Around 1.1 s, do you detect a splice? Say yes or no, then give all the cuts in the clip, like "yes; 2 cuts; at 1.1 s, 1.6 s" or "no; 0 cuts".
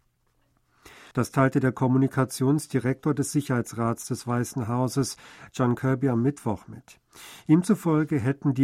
yes; 1 cut; at 1.1 s